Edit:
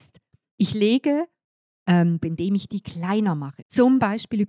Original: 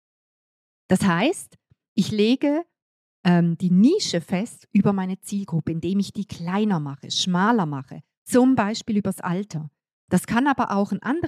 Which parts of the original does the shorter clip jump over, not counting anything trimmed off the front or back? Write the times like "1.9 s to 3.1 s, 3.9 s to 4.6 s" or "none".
3.6 s to 5.7 s, 7.0 s to 8.1 s